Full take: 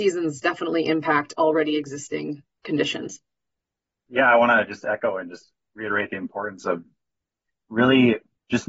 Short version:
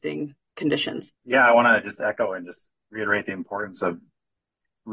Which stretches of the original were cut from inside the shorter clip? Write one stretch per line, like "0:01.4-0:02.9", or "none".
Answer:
0:03.2-0:04.0